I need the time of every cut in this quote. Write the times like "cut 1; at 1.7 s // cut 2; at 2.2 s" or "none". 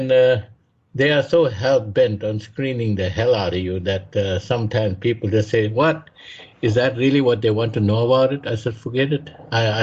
none